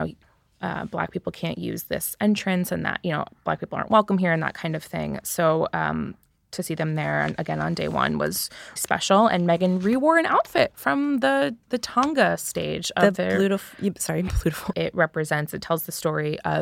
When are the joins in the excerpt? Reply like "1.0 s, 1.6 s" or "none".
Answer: 8.8 s, 14.7 s